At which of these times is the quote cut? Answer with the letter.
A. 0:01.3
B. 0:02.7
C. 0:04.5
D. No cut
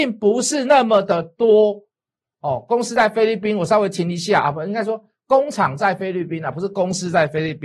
D